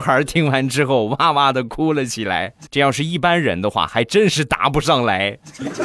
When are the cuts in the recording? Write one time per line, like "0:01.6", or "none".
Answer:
0:02.7